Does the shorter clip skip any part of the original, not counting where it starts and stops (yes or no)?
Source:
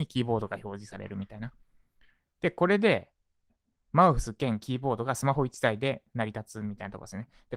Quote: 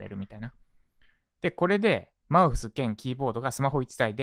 yes